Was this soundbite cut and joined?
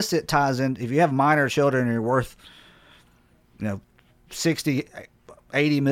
no; 0 cuts

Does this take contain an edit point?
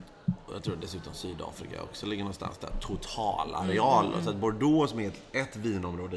no; 0 cuts

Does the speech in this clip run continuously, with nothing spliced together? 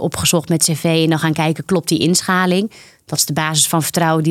yes; 0 cuts

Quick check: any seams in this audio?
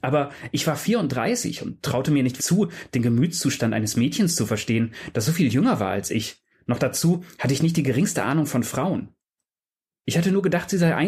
yes; 1 cut; at 2.4 s

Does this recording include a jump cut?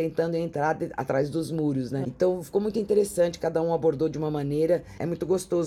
yes; 1 cut; at 2.0 s

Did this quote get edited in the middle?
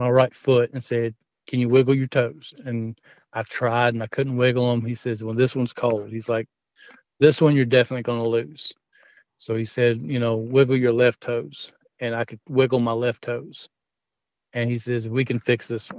no; 0 cuts

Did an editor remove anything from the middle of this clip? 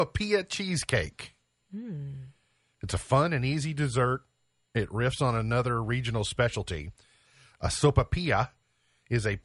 no; 0 cuts

